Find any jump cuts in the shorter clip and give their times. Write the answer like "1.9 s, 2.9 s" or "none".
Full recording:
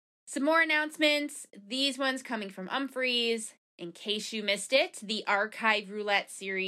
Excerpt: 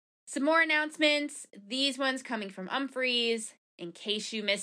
none